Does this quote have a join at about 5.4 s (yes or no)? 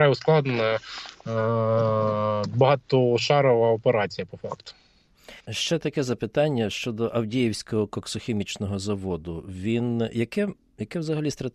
yes